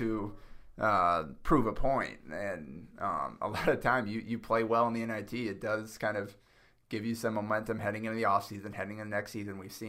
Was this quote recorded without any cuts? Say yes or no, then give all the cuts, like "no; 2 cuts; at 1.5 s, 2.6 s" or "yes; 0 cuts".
yes; 0 cuts